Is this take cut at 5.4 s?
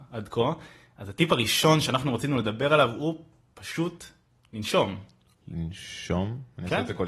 no; 0 cuts

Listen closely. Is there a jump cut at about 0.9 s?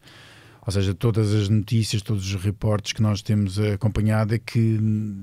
no; 0 cuts

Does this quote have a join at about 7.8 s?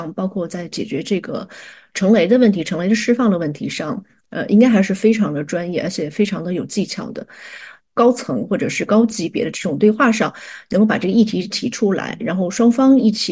yes; 1 cut; at 7.8 s

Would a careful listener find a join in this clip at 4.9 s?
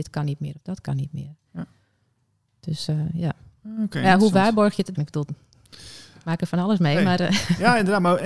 yes; 1 cut; at 4.9 s

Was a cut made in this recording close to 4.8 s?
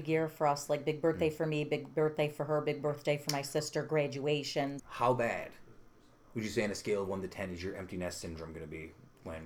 yes; 1 cut; at 4.8 s

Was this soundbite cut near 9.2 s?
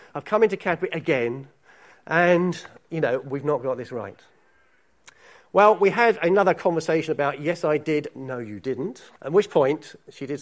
yes; 1 cut; at 9.2 s

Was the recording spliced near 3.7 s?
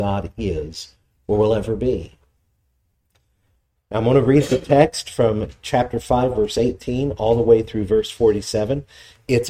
yes; 1 cut; at 3.7 s

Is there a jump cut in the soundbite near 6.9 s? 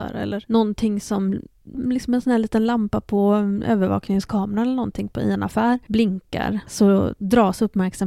no; 1 cut; at 1.7 s

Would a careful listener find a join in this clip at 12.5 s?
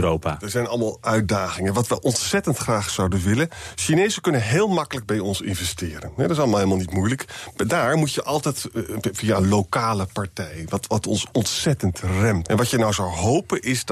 yes; 1 cut; at 12.5 s

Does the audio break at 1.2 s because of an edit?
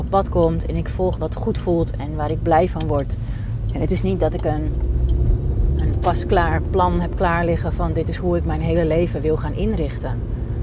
yes; 1 cut; at 1.2 s

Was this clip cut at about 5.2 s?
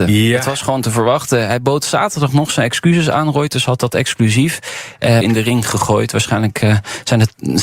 yes; 1 cut; at 5.2 s

